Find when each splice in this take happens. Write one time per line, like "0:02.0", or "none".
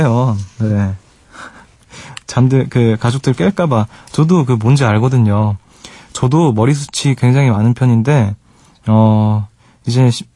none